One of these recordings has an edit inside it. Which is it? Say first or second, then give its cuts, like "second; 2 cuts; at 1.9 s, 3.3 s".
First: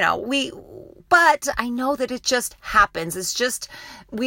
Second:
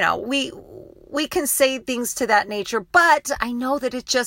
first; 1 cut; at 1.0 s